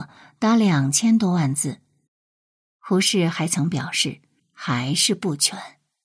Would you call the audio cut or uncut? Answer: cut